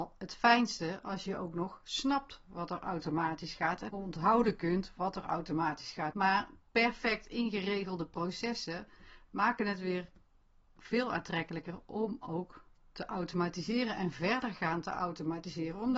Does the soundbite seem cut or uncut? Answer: cut